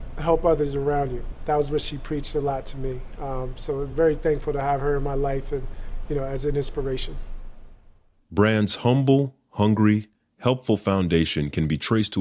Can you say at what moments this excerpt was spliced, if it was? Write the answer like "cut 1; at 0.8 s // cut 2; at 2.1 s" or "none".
none